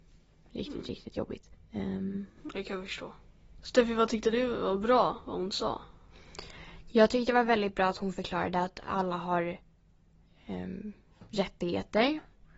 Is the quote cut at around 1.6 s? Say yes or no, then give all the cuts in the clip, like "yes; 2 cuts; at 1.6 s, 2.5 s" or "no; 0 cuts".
no; 0 cuts